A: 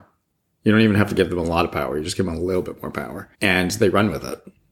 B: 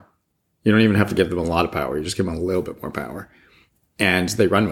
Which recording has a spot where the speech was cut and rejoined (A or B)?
A